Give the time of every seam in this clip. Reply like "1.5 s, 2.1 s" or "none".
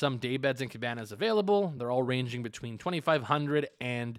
none